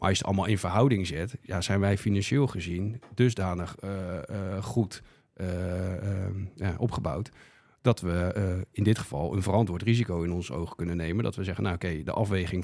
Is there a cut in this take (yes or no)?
no